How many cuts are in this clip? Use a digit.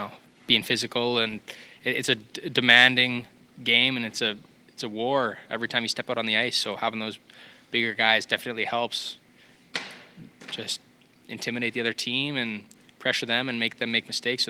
0